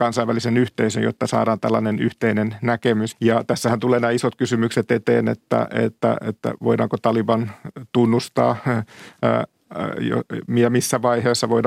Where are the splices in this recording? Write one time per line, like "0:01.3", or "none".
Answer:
0:03.1